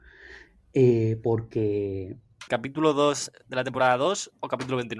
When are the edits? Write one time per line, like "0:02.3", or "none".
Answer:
0:02.5